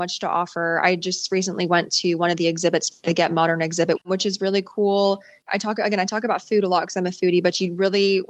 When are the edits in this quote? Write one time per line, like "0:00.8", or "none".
0:04.0